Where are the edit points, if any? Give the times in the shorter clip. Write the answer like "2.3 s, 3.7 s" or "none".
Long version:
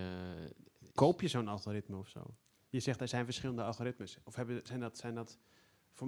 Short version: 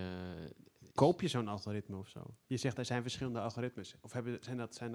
2.4 s